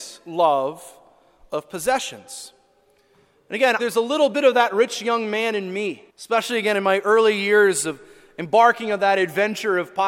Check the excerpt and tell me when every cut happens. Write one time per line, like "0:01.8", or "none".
0:03.8
0:06.1